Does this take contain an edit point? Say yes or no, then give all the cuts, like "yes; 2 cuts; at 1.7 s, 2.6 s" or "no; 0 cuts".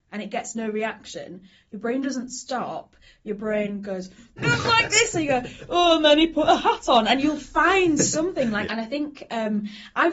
yes; 2 cuts; at 4.4 s, 8.6 s